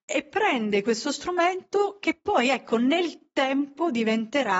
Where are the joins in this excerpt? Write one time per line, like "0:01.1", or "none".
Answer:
none

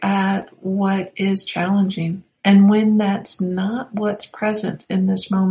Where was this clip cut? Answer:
0:02.4

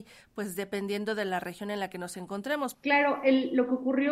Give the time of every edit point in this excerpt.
0:02.7

